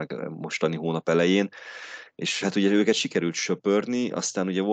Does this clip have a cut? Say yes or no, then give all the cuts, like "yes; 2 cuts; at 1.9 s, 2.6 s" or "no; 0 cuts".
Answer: yes; 1 cut; at 2.4 s